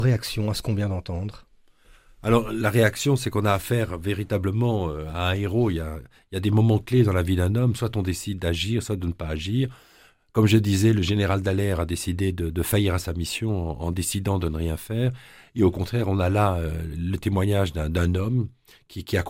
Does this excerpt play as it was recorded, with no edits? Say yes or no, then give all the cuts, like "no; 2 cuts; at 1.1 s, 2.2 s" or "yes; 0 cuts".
yes; 0 cuts